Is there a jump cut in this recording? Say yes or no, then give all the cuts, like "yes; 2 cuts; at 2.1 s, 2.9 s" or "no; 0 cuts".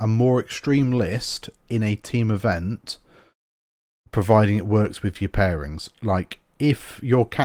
no; 0 cuts